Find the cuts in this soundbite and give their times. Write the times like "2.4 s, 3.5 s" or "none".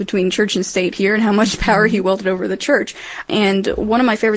3.3 s